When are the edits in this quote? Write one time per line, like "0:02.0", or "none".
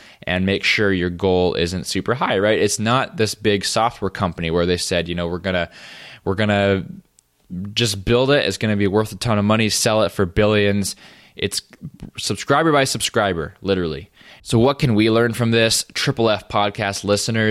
0:14.4